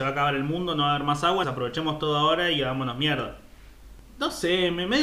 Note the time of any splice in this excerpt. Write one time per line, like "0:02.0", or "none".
0:01.4
0:04.0